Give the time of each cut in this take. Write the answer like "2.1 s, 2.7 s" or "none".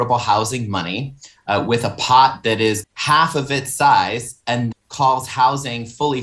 2.8 s, 4.7 s